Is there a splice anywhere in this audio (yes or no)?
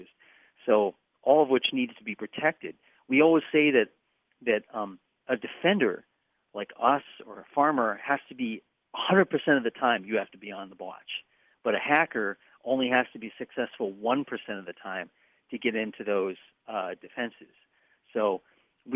no